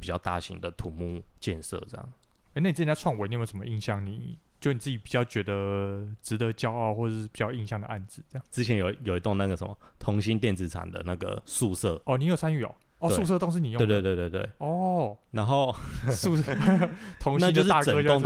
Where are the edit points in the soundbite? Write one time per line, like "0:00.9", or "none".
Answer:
none